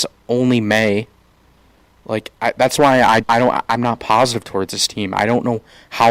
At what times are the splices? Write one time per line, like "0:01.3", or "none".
0:03.2